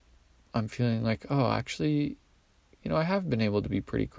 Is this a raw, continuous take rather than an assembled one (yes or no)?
yes